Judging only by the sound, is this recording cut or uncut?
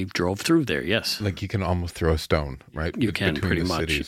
uncut